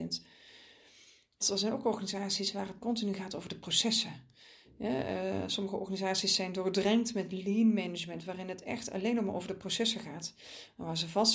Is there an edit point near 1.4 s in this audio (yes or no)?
yes